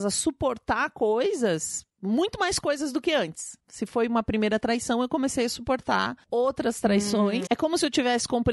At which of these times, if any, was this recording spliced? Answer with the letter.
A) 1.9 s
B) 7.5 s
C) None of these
B